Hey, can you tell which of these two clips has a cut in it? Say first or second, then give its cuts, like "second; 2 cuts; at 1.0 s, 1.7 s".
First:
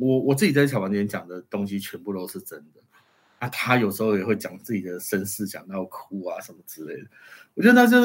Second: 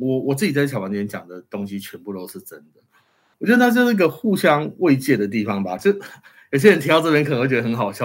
second; 2 cuts; at 3.3 s, 5.8 s